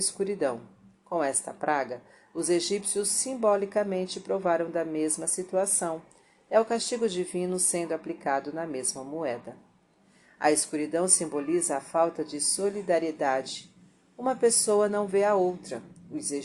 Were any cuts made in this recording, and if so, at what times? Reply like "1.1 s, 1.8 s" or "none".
none